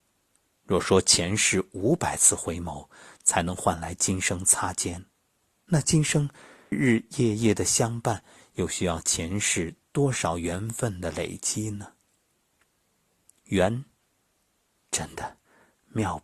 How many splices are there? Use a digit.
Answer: 1